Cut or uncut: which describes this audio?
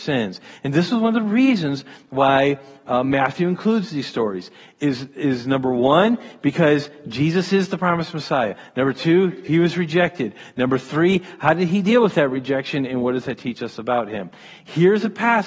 uncut